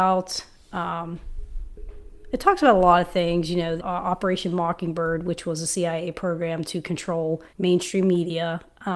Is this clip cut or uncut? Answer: cut